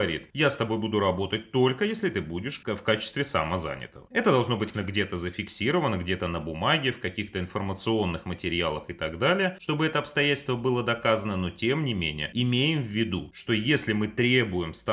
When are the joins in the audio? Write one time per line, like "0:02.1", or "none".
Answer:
0:04.7